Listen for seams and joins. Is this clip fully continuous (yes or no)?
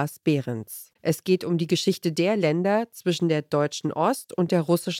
no